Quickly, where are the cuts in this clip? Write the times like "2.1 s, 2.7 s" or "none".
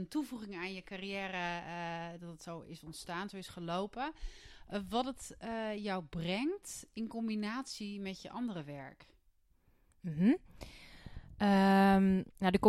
none